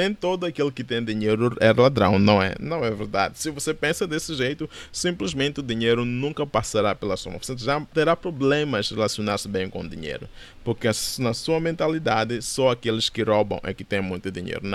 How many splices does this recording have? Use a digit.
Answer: 0